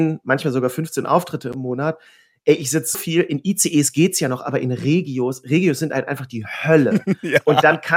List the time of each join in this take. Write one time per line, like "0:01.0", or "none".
0:02.9